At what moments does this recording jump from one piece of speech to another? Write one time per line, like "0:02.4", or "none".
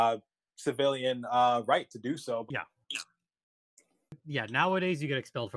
0:02.5